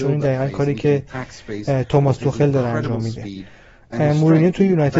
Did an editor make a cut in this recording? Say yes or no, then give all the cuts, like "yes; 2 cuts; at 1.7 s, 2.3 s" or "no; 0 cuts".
no; 0 cuts